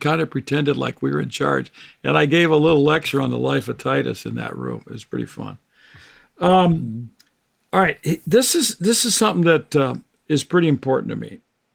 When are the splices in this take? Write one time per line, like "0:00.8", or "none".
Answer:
none